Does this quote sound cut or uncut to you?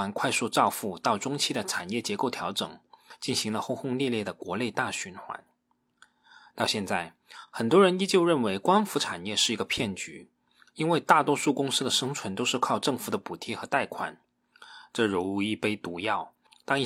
uncut